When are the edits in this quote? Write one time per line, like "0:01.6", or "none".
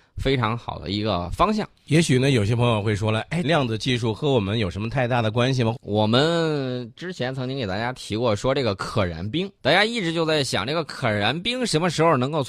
0:03.4
0:05.7
0:09.6